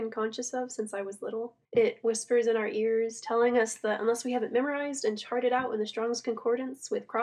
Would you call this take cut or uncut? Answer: cut